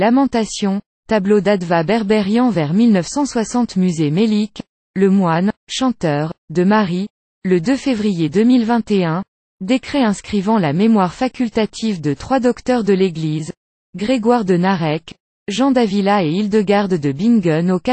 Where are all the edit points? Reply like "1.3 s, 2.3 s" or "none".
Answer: none